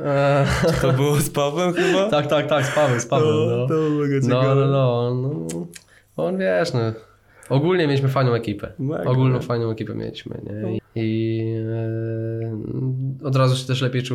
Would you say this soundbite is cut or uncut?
cut